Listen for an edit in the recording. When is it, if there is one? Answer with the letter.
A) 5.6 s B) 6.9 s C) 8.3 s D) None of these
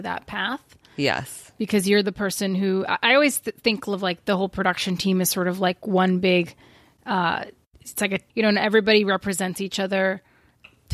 C